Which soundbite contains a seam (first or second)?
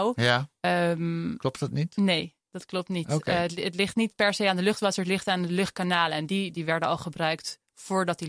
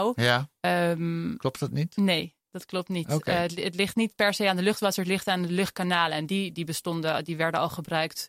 first